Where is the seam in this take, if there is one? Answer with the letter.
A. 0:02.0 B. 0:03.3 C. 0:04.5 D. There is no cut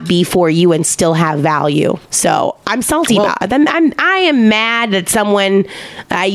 A